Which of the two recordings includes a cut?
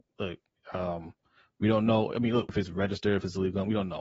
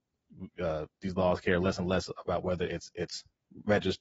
first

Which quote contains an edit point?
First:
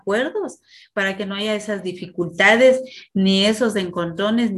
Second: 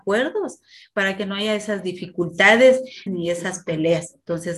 second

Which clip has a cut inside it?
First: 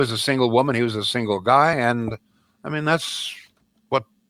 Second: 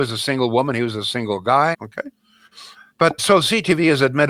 second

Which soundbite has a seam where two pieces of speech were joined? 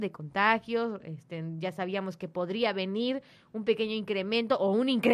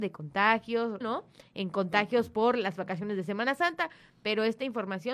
second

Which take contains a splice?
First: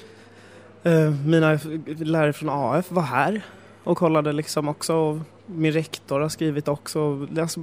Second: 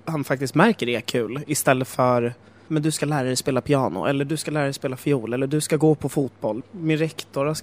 second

